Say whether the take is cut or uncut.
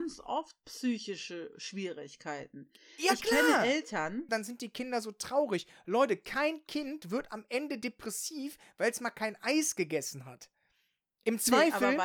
cut